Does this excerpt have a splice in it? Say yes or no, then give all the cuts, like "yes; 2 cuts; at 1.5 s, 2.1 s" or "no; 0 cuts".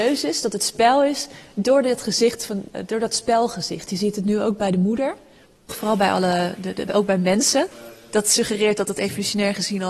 yes; 2 cuts; at 5.7 s, 6.9 s